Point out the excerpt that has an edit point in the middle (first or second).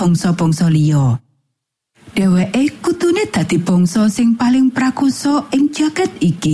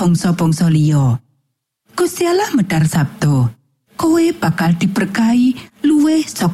second